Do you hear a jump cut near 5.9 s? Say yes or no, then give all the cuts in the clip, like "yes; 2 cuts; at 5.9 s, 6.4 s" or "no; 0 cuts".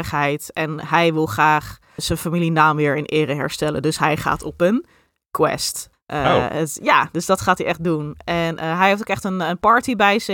yes; 2 cuts; at 2.0 s, 5.9 s